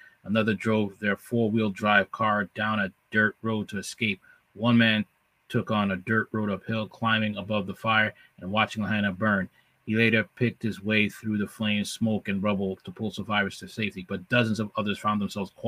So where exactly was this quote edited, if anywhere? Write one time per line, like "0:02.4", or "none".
none